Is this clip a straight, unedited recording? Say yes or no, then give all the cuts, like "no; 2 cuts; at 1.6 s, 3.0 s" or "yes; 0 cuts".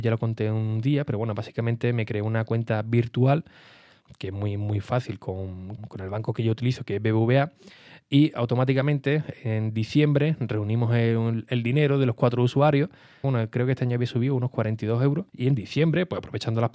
no; 3 cuts; at 5.8 s, 13.2 s, 15.3 s